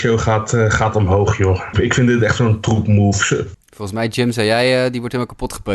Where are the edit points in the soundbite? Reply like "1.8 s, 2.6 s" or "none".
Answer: 1.7 s, 3.5 s